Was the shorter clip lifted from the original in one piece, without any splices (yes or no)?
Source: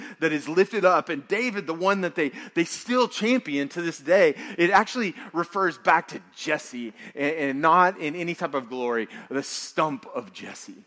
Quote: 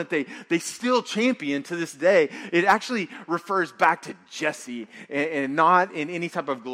yes